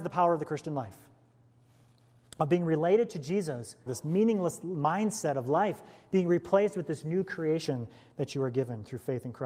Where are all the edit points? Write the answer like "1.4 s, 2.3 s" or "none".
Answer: 3.9 s